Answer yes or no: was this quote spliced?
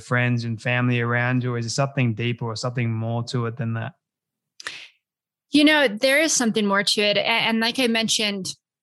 no